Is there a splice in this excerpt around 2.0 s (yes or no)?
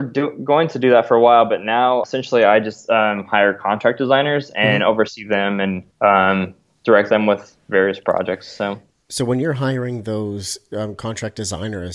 yes